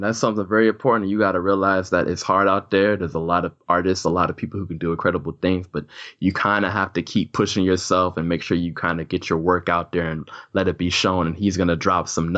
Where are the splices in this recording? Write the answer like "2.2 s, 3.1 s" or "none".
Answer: none